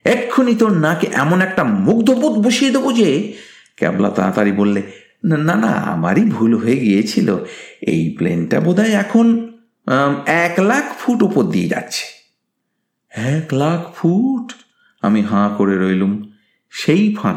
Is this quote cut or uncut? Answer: uncut